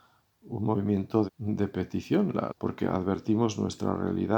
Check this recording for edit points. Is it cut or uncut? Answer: cut